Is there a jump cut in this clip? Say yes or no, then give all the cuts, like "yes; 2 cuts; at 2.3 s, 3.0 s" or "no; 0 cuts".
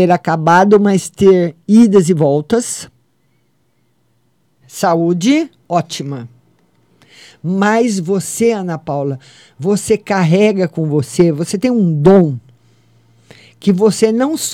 yes; 1 cut; at 4.6 s